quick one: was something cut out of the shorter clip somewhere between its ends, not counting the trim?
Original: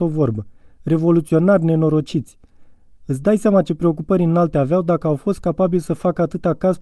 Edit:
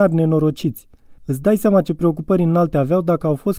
yes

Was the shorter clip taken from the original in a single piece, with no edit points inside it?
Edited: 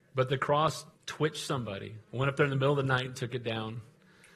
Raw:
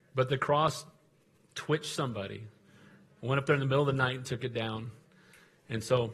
no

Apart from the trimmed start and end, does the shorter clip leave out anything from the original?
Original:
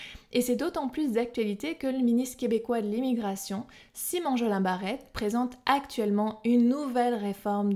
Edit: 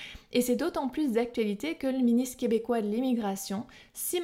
no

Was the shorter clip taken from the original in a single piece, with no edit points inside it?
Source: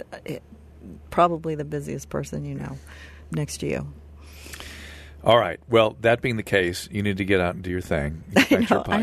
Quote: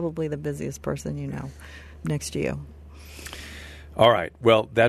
yes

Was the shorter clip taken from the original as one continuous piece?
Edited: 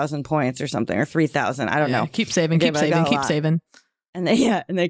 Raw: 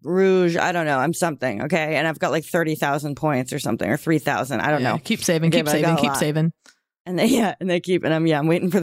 yes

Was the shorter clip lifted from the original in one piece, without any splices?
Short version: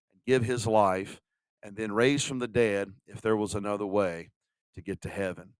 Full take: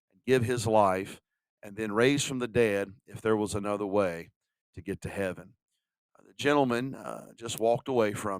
yes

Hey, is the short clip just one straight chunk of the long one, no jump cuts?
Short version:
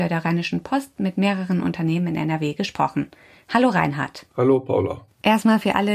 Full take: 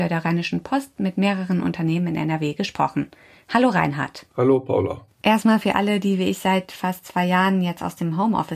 yes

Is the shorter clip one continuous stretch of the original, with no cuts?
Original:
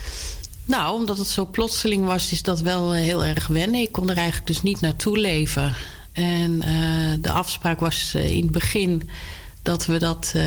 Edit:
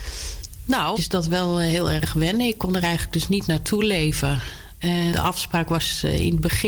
no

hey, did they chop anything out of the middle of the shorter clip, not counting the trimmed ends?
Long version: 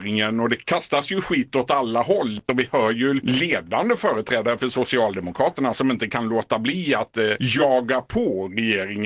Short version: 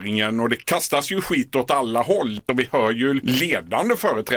no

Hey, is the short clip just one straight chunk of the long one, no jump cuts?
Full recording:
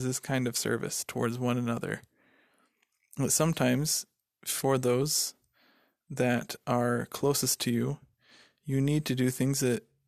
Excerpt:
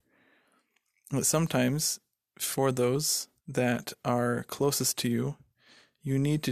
no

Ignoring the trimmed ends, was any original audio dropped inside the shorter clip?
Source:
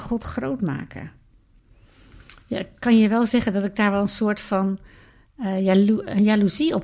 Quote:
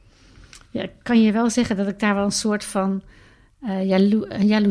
no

